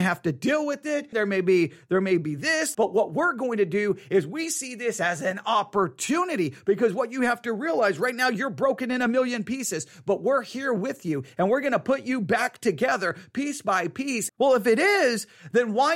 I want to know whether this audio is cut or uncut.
cut